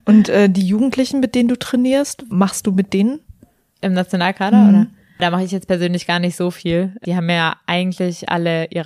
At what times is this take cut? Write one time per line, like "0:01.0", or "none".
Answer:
0:02.3